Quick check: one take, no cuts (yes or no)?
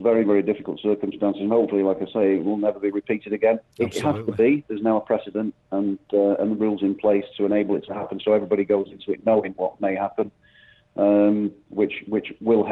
yes